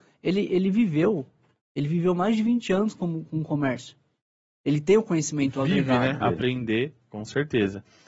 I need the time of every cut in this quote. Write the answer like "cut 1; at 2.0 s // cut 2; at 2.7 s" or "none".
cut 1; at 6.2 s